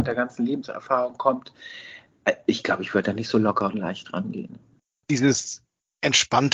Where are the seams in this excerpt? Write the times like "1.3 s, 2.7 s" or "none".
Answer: 5.0 s